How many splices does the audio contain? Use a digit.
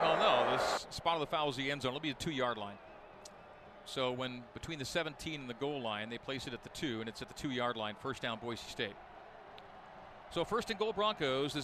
0